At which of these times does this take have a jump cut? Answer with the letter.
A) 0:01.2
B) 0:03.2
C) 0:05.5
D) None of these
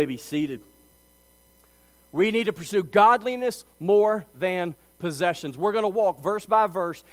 D